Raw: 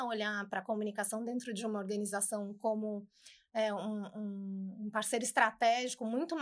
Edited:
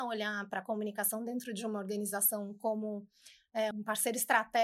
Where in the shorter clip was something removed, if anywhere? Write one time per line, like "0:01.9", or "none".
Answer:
0:03.7